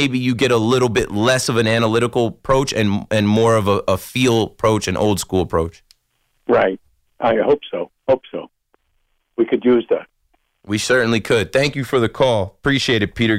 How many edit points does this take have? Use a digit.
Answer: 1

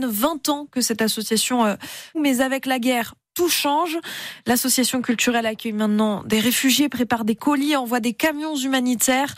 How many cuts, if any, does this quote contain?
1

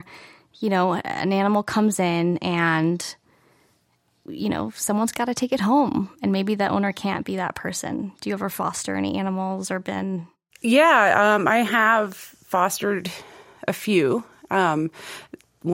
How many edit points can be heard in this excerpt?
1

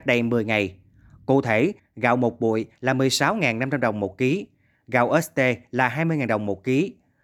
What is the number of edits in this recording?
1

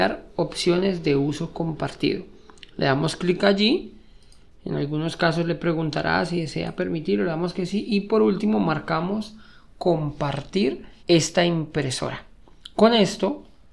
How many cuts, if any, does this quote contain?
1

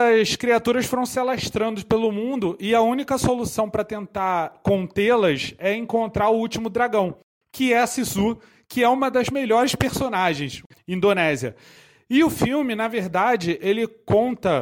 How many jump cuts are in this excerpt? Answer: 1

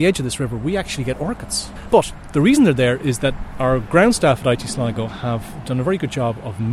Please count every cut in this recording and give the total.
1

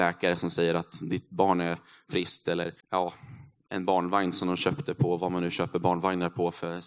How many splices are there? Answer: 1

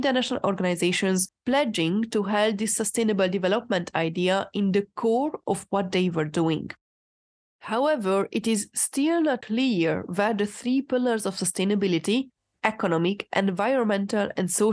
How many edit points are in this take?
0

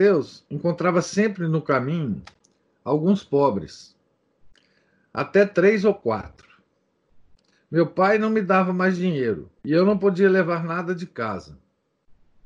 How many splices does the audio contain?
2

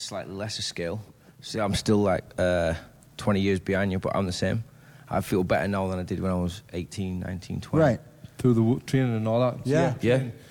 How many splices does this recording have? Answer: 0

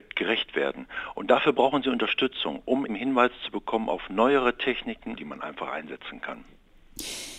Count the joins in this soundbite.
2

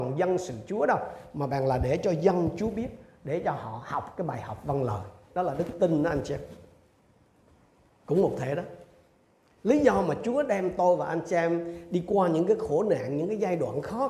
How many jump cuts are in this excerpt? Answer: 1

